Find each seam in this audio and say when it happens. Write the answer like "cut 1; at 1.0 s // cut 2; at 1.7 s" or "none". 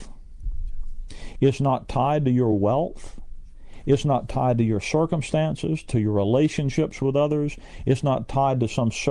none